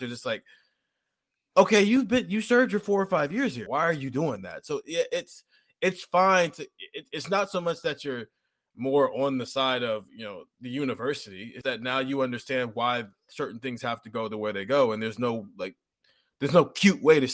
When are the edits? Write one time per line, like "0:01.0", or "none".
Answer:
0:03.7
0:11.6